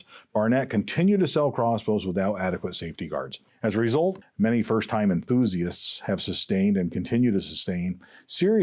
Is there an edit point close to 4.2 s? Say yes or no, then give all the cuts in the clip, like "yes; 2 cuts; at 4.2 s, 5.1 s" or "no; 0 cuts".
yes; 1 cut; at 4.2 s